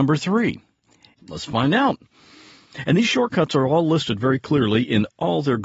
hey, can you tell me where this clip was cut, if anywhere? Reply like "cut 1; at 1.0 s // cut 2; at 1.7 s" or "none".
cut 1; at 1.2 s